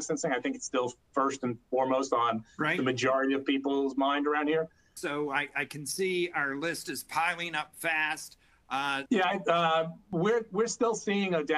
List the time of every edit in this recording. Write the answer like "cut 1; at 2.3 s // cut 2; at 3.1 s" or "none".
cut 1; at 5.0 s // cut 2; at 9.1 s